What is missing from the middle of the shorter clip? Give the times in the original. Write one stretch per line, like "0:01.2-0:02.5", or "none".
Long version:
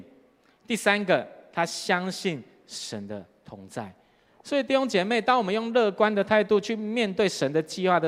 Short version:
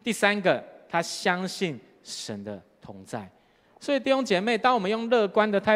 none